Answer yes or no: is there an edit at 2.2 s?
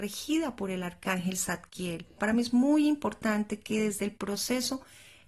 yes